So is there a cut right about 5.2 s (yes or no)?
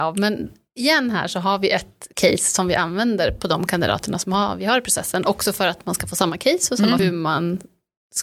no